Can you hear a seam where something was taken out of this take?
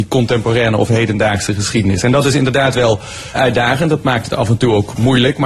yes; 1 cut; at 3.4 s

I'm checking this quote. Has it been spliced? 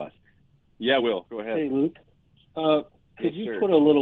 no; 0 cuts

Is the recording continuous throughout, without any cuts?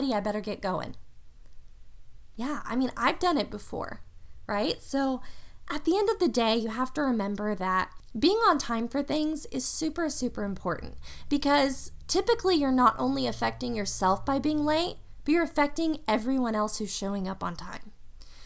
no; 1 cut; at 2.4 s

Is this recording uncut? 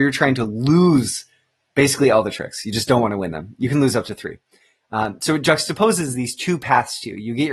yes; 0 cuts

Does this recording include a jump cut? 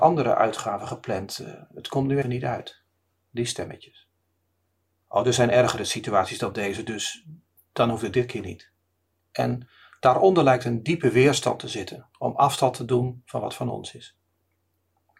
yes; 3 cuts; at 2.2 s, 5.0 s, 9.1 s

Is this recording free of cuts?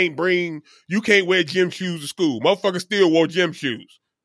yes; 0 cuts

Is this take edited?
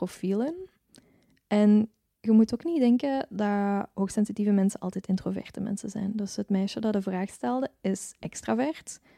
no; 0 cuts

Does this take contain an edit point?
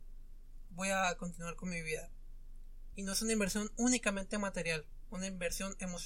yes; 2 cuts; at 2.9 s, 5.1 s

